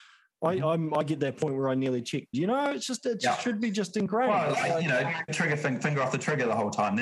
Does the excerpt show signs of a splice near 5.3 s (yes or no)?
yes